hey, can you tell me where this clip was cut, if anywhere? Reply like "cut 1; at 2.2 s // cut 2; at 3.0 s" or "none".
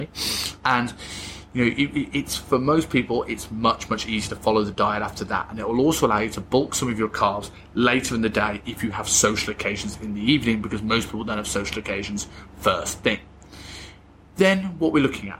none